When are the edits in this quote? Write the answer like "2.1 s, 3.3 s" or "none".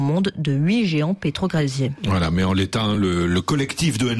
none